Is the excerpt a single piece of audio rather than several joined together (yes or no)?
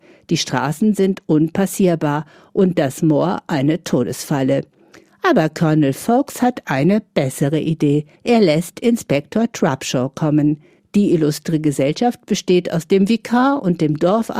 no